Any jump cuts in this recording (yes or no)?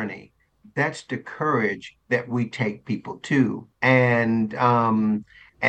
yes